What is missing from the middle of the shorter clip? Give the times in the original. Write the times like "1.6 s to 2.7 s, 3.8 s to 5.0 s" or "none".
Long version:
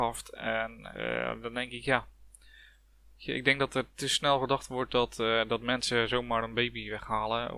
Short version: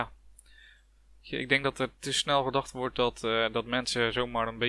none